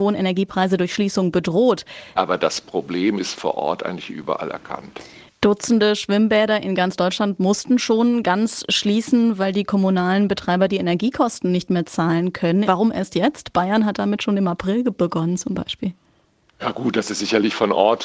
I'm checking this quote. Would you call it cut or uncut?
cut